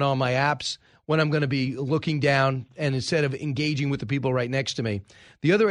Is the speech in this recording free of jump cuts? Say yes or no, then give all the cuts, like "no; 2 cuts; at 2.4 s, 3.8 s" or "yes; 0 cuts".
yes; 0 cuts